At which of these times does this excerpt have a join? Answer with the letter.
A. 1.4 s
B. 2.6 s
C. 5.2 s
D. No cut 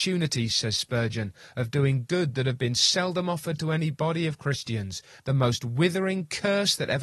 C